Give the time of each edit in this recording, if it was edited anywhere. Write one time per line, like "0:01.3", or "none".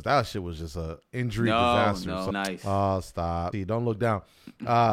0:02.3
0:03.5